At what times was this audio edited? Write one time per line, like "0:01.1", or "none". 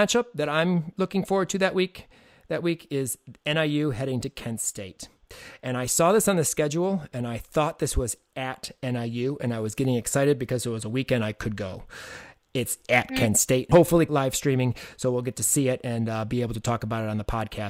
0:14.1